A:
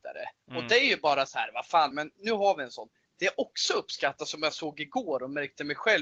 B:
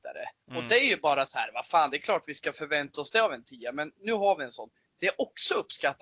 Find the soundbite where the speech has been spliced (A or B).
A